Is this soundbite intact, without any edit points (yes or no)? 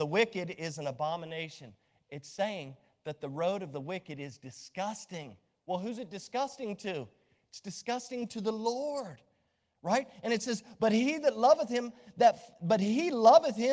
yes